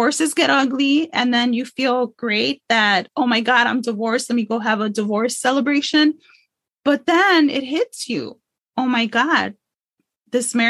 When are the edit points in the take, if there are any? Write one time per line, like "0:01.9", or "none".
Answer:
none